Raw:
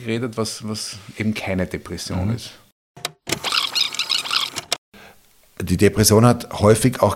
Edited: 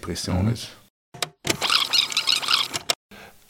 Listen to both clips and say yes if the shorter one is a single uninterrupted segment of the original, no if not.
yes